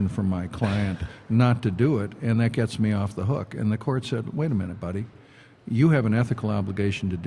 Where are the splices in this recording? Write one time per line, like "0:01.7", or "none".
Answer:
none